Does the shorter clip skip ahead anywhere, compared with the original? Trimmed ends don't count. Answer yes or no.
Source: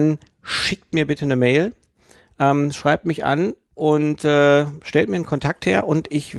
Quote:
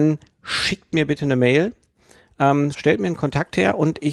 yes